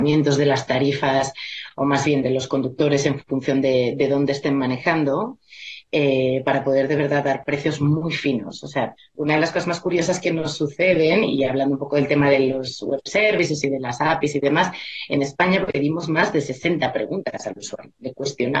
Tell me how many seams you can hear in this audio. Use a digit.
1